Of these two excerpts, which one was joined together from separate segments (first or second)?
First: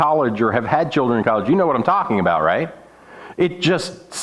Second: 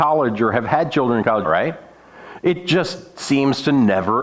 second